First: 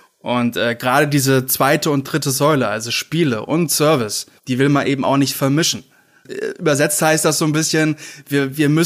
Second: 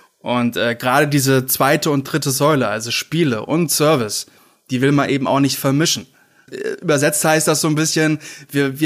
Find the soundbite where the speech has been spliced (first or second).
first